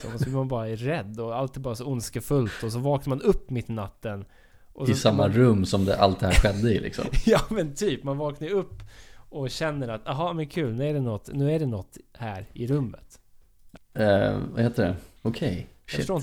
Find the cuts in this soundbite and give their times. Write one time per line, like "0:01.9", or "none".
0:13.8
0:15.2